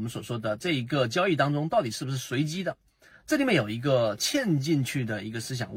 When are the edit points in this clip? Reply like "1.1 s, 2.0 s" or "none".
none